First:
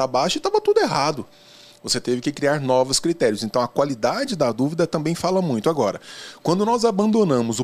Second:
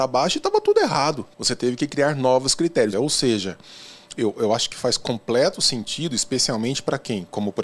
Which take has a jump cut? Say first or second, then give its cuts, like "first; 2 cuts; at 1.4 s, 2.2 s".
second; 2 cuts; at 1.3 s, 2.9 s